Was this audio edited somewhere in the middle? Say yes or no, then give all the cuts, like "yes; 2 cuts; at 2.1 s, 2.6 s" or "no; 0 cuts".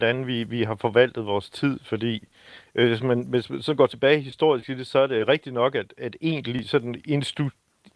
no; 0 cuts